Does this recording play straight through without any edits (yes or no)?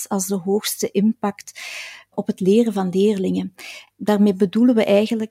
yes